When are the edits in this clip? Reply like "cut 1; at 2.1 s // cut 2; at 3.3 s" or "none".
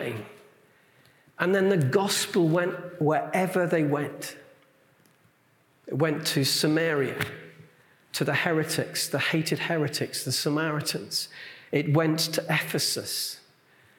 none

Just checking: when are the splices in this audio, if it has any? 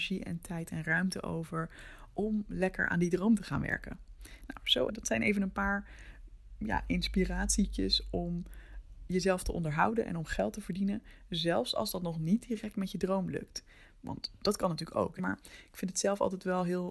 cut 1; at 4.9 s // cut 2; at 15.2 s

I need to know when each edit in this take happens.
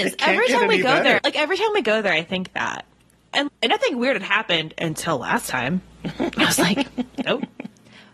cut 1; at 1.2 s // cut 2; at 3.5 s

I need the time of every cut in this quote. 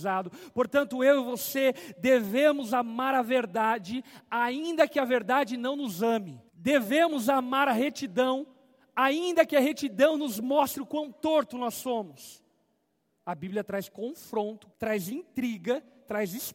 cut 1; at 6.5 s // cut 2; at 13.2 s // cut 3; at 14.7 s

